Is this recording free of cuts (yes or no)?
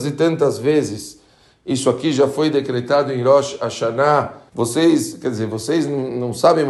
no